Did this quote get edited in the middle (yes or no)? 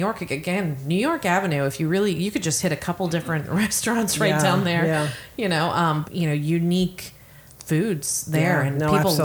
yes